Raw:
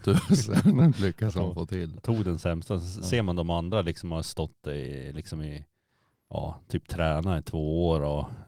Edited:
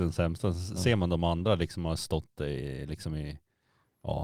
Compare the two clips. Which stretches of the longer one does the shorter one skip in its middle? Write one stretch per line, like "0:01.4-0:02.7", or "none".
none